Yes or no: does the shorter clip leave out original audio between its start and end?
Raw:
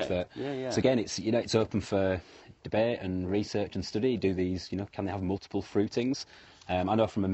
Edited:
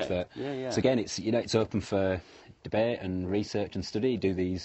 no